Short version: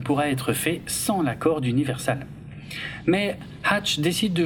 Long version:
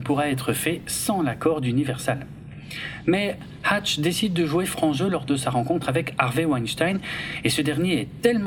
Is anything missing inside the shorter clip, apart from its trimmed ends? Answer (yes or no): no